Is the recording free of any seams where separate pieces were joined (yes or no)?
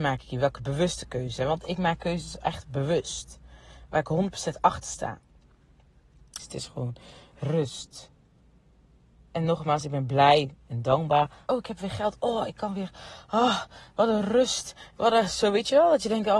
no